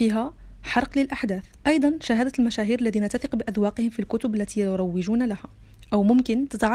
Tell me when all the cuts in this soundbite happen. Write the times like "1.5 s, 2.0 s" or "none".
1.5 s